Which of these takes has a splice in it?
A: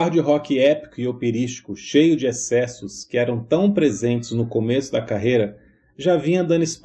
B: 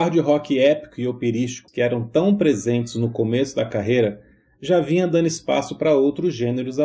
B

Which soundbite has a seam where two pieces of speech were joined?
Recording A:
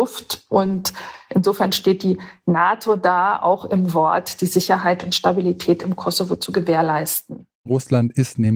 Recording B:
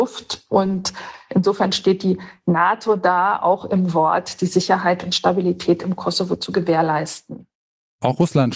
A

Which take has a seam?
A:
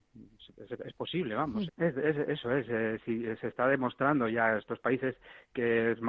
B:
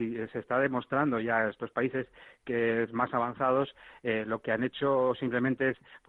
A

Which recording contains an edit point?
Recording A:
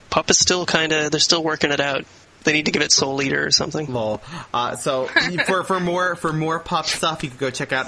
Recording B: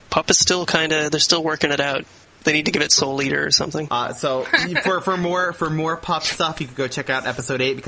B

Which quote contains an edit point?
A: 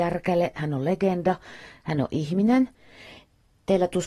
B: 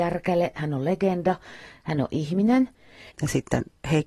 B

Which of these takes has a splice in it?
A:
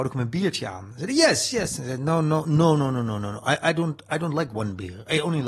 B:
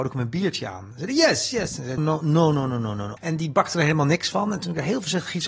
B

